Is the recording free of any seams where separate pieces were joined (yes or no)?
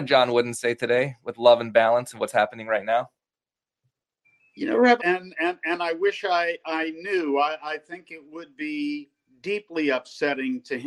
no